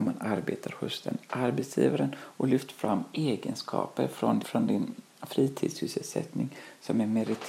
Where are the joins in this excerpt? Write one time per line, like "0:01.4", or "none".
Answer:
0:04.4